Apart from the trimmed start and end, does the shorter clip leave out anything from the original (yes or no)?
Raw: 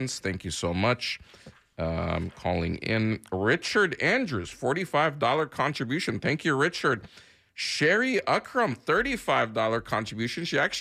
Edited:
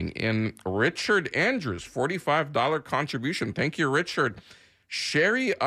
no